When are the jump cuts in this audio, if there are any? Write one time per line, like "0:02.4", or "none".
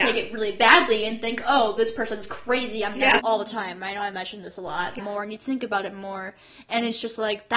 0:03.2
0:05.0